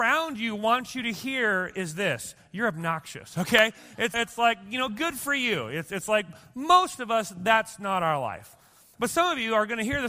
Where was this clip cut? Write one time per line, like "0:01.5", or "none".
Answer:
0:04.1